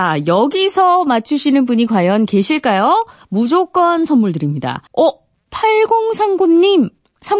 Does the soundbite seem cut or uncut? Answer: cut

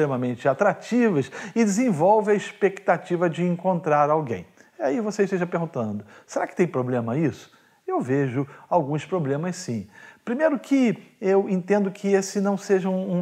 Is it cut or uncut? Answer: uncut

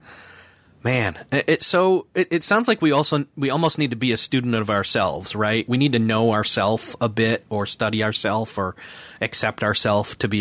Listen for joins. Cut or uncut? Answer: uncut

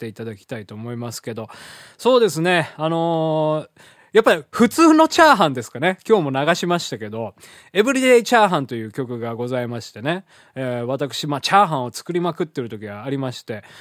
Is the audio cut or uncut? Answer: uncut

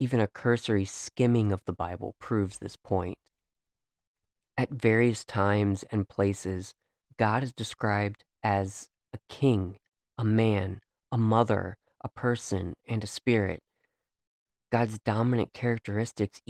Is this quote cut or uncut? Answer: uncut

